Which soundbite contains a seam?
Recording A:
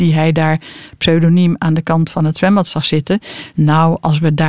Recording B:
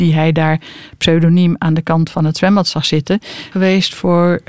B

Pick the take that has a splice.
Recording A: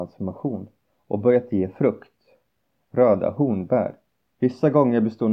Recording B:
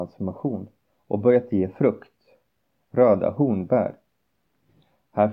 A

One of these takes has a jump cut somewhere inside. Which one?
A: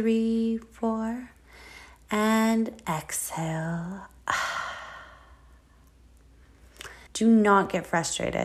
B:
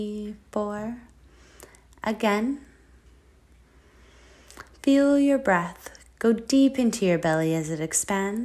A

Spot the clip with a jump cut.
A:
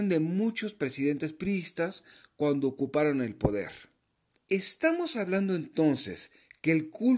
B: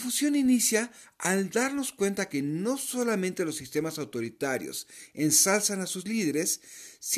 A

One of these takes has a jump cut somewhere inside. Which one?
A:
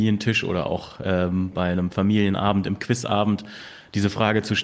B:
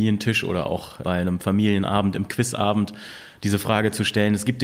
B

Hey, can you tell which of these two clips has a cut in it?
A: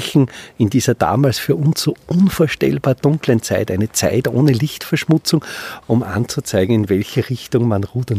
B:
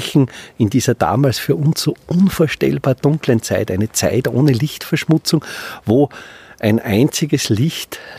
A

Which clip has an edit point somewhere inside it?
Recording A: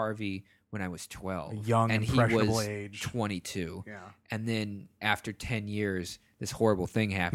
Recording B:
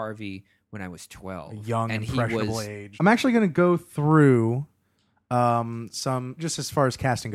B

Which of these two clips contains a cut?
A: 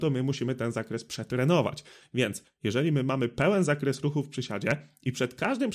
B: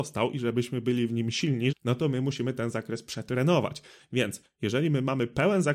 B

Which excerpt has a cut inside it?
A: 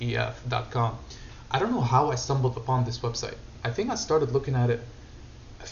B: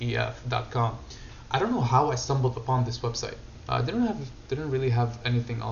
B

